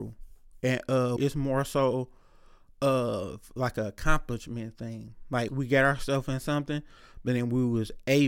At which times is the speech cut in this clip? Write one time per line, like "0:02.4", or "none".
0:01.2
0:05.5